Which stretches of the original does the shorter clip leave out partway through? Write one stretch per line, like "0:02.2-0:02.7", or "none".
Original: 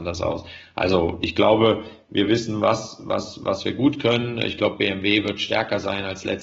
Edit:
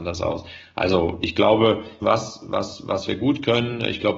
0:02.0-0:02.6